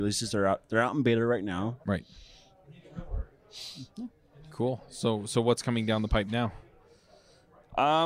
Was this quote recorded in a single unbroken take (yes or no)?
no